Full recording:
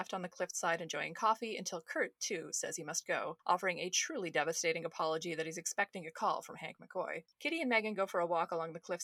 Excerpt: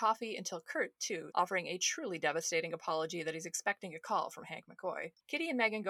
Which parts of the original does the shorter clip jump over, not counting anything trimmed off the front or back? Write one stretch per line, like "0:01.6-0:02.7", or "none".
0:02.5-0:03.4

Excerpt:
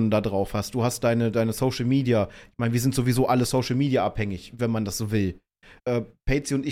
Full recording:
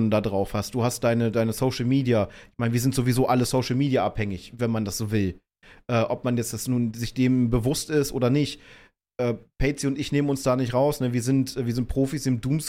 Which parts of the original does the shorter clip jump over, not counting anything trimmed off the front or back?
0:05.8-0:09.1

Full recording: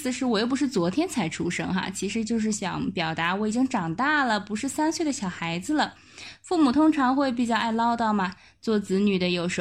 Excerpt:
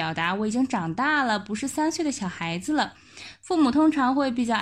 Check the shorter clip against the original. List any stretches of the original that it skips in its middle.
none

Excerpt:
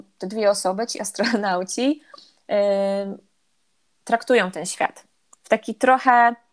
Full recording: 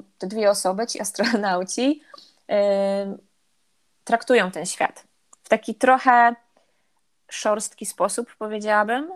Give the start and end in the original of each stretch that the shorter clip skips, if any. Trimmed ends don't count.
none

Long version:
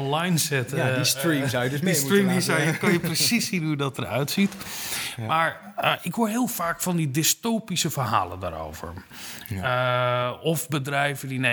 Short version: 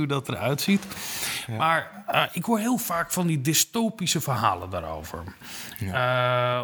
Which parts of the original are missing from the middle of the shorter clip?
none

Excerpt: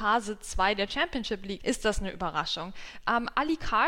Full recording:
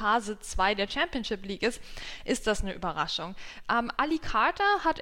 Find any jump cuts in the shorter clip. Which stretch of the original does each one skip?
0:01.6-0:02.2

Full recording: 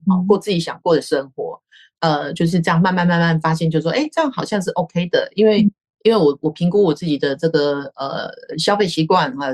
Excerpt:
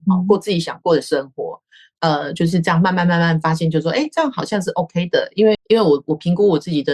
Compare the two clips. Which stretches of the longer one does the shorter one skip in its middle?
0:05.5-0:05.9

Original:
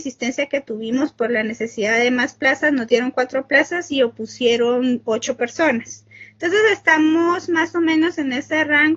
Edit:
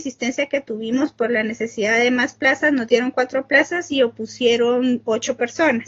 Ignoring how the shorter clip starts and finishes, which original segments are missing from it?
none

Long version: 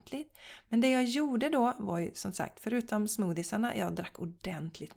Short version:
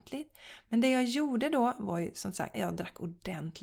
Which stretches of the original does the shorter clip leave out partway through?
0:02.5-0:03.7

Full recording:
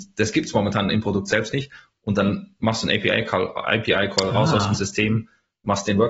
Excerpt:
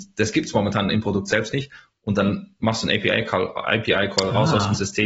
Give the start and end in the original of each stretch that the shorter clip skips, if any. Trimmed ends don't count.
none

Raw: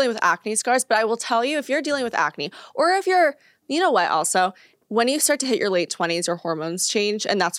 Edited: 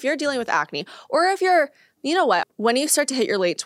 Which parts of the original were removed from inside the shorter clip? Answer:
0:04.1-0:04.7

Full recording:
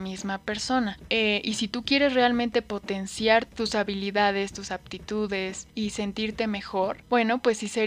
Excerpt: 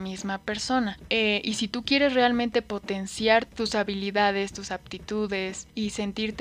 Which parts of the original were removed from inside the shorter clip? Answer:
none

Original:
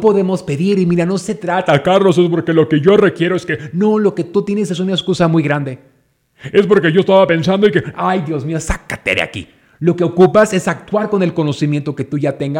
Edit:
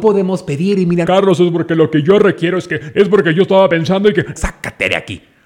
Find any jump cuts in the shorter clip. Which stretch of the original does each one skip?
0:01.0-0:01.8
0:03.7-0:06.5
0:07.9-0:08.6

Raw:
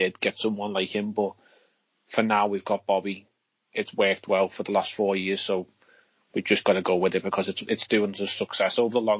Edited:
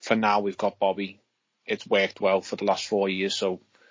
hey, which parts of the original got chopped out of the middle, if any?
none

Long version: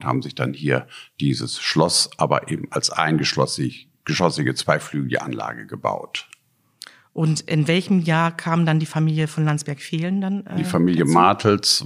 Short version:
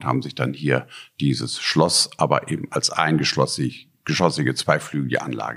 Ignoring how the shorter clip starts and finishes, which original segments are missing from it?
none

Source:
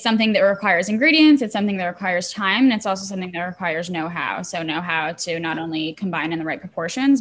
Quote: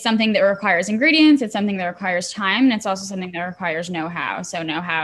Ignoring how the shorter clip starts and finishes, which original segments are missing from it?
none

